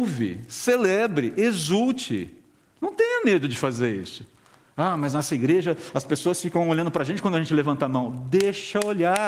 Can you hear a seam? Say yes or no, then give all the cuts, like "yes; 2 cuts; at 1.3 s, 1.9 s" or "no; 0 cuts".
no; 0 cuts